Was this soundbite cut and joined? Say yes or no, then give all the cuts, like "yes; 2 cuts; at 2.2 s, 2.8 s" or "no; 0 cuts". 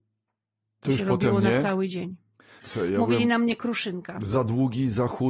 yes; 1 cut; at 2.6 s